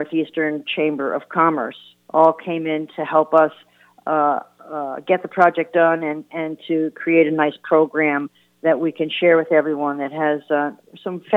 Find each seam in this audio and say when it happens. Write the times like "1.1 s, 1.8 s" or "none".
none